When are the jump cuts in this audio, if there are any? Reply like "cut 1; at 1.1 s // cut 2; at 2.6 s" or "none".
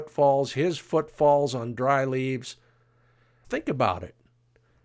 cut 1; at 3.4 s